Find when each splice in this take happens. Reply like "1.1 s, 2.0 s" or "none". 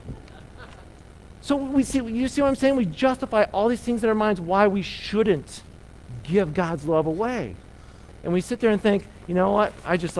none